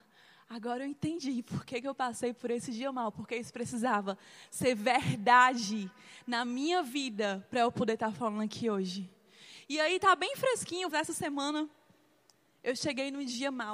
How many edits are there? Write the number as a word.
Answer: one